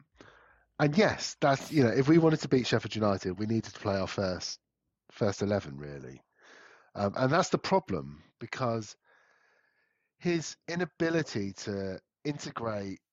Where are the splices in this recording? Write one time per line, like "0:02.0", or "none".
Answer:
none

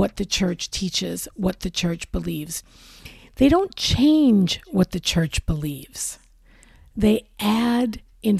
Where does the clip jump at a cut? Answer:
none

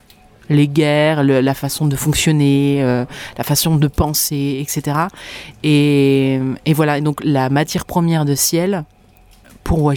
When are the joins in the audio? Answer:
none

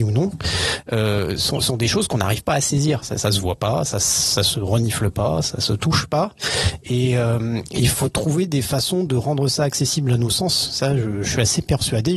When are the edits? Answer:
none

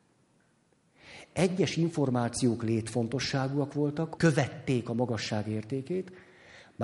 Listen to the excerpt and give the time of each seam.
0:04.2

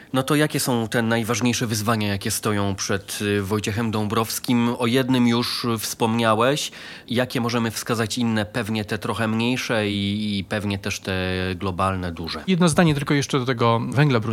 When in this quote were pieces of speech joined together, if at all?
none

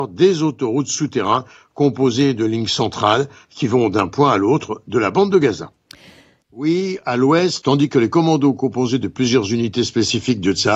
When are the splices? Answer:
0:06.4
0:07.6

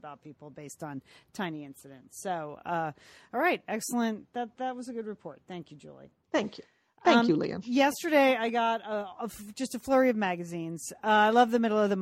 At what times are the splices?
none

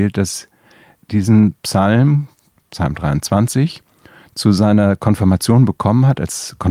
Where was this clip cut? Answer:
0:01.0

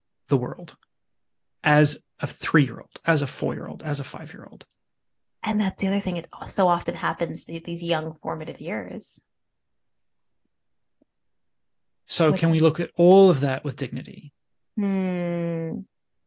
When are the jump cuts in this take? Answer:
none

